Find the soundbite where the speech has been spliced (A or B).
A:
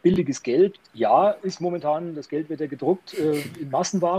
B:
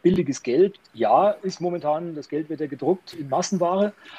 B